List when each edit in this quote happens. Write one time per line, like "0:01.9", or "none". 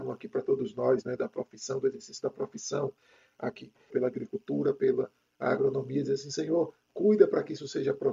0:03.9